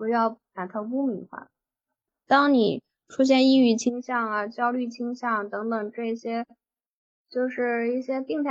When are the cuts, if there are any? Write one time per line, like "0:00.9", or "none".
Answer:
0:02.3